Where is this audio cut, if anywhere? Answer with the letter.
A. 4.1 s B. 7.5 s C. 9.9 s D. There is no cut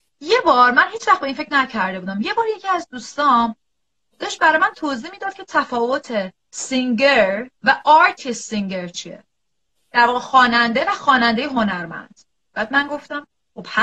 B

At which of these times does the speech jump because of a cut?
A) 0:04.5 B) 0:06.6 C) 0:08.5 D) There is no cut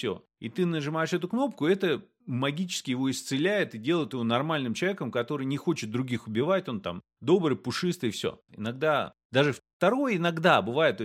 C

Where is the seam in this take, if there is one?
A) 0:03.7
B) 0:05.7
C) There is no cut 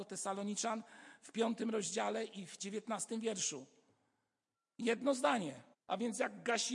B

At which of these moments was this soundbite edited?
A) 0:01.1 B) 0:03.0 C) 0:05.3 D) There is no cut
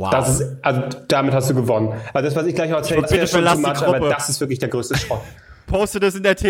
B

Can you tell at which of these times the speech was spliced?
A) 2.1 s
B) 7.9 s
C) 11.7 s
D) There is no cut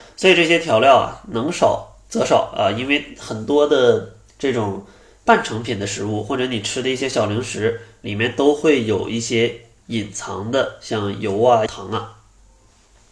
C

